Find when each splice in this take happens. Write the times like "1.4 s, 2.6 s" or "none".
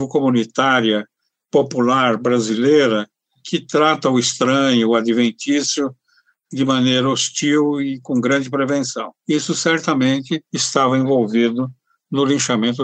9.2 s, 10.5 s